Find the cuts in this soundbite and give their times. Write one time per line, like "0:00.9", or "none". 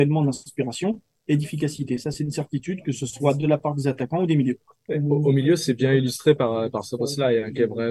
none